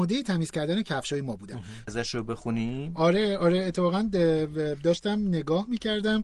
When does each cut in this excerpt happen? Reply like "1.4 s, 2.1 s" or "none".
1.9 s